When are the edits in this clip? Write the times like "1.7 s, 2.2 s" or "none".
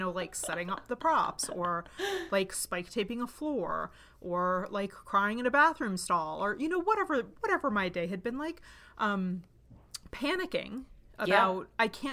none